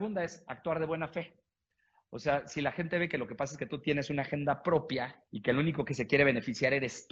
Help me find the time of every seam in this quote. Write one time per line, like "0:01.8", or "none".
0:05.3